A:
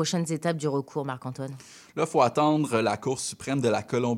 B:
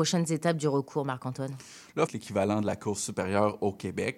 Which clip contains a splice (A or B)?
B